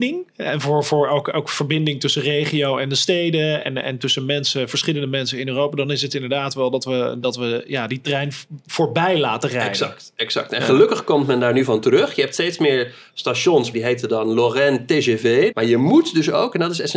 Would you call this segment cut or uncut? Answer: cut